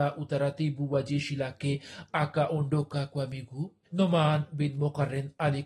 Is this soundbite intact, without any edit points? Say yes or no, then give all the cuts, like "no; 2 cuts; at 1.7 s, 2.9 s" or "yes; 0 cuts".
no; 1 cut; at 3.8 s